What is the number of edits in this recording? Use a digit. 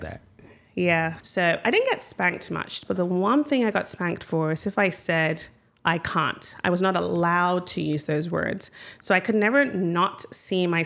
1